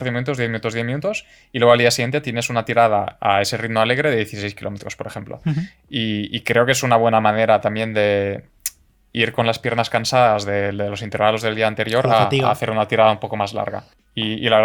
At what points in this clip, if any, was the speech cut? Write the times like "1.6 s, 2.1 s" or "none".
none